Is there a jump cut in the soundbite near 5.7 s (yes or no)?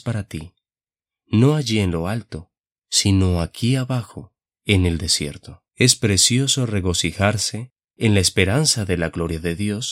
yes